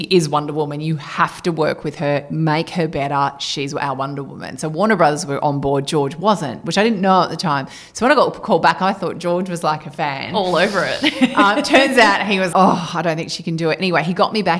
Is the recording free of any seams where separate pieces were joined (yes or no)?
no